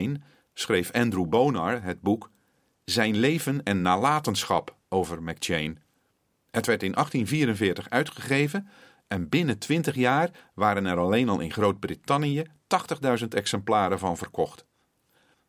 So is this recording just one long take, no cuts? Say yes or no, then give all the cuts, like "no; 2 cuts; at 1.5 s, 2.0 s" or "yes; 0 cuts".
yes; 0 cuts